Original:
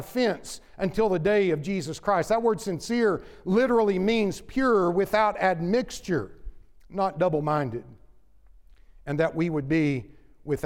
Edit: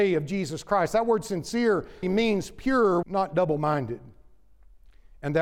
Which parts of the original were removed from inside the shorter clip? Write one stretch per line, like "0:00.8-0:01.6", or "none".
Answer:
0:03.4-0:03.9
0:04.9-0:06.9